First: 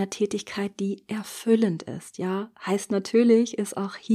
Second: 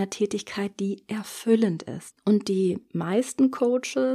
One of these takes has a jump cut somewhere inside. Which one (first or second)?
second